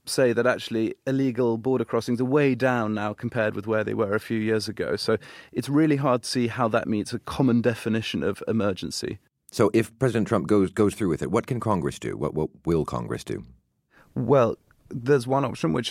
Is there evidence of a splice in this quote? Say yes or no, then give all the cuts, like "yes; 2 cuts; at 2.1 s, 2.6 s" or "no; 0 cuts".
no; 0 cuts